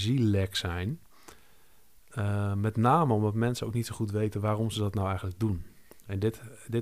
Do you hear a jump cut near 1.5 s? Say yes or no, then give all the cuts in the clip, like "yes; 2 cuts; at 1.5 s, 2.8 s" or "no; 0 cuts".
no; 0 cuts